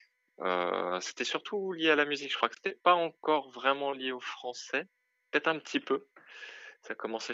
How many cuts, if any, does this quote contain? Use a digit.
0